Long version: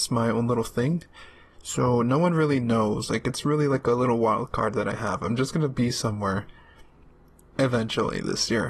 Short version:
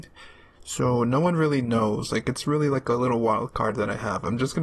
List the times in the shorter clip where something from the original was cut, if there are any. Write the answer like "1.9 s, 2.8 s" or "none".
none